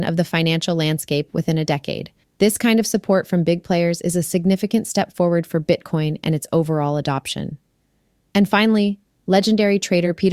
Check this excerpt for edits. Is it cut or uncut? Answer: cut